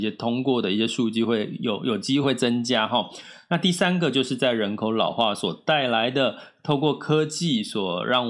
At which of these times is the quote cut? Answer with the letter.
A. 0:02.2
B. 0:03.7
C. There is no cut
A